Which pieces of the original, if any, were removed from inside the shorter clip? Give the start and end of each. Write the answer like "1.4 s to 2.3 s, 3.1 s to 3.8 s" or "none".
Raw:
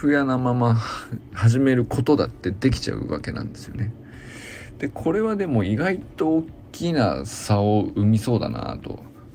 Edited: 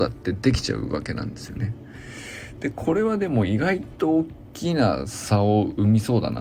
none